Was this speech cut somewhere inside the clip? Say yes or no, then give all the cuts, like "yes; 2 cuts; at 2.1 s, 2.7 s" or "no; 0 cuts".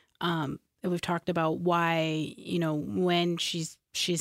no; 0 cuts